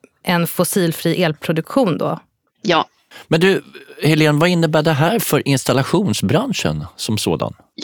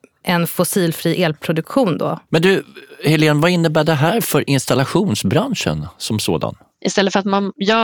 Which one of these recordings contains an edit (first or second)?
second